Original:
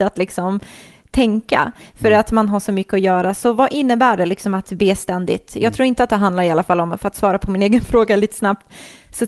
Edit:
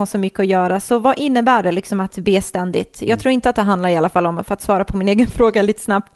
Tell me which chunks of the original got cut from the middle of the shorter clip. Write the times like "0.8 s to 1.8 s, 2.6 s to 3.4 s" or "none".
none